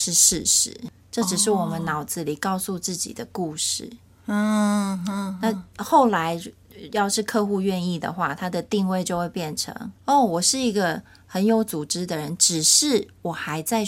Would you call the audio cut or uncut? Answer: cut